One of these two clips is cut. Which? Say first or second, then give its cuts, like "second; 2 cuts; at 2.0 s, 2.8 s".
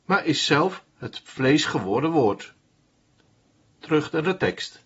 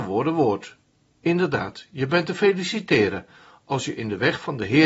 second; 1 cut; at 1.1 s